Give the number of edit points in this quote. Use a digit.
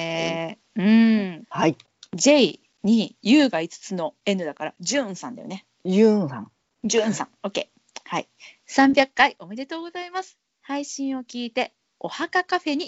2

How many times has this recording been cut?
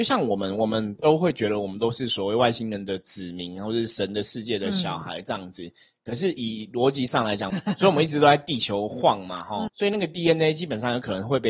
2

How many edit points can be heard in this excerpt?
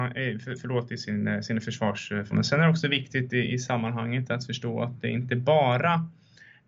1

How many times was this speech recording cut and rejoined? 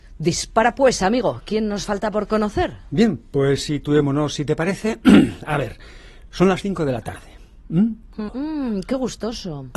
1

